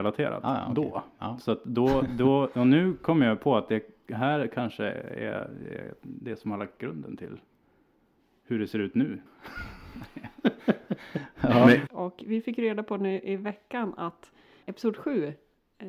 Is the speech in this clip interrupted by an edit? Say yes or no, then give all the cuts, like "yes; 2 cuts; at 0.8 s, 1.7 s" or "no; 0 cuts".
yes; 3 cuts; at 9.3 s, 11.9 s, 14.6 s